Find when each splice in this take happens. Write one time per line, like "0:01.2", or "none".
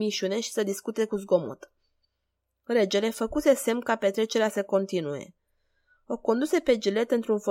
none

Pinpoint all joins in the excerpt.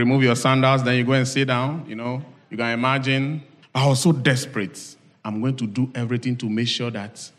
0:05.1

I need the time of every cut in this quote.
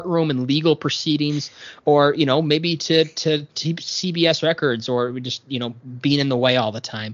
none

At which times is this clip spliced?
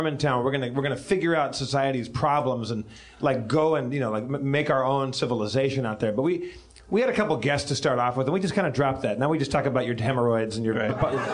none

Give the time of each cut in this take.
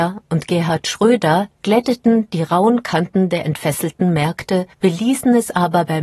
0:01.6
0:04.7

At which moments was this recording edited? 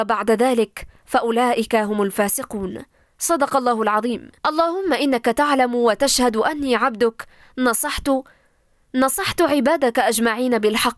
0:04.4

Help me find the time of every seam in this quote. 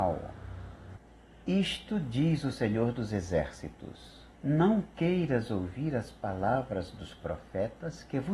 0:01.4
0:04.3

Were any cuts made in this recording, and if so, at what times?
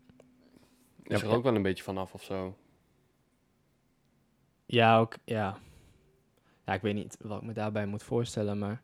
none

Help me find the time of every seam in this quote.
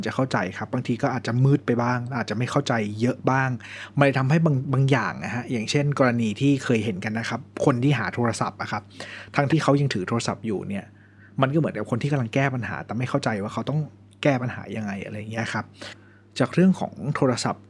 0:09.5

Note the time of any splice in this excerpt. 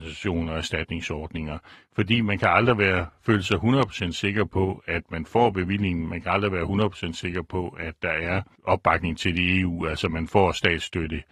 none

